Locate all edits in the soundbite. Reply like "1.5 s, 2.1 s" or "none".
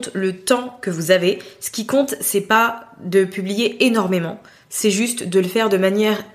none

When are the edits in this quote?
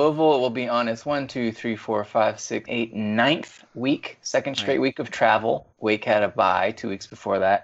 2.7 s, 5.7 s

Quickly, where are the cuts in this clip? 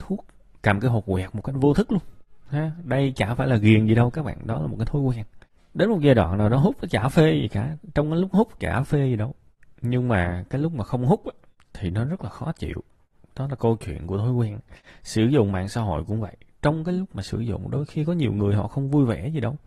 none

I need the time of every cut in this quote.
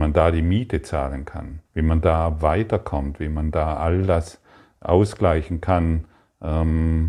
1.7 s

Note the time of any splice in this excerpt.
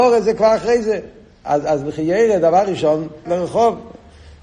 3.3 s

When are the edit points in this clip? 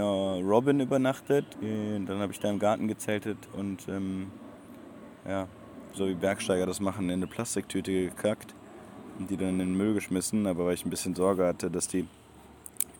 1.5 s, 5.9 s

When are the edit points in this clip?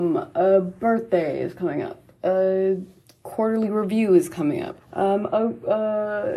4.8 s

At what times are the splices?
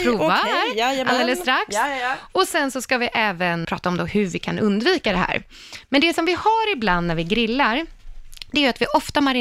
3.6 s

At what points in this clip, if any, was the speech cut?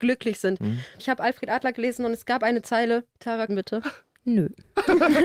1.0 s, 3.5 s

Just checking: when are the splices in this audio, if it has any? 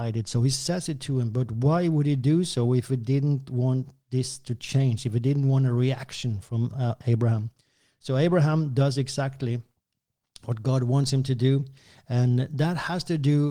none

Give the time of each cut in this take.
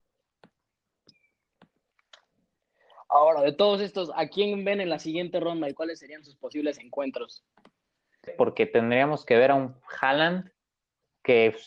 8.3 s

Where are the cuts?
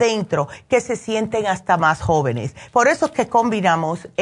none

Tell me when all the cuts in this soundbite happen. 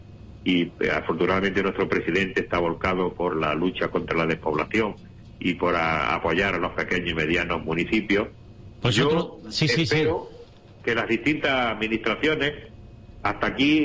8.8 s

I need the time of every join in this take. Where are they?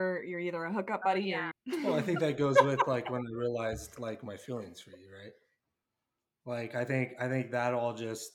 1.5 s

